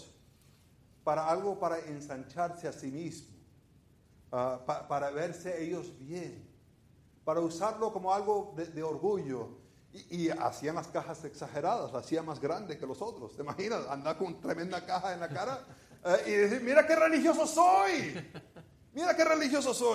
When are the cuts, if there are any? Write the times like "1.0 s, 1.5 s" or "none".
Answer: none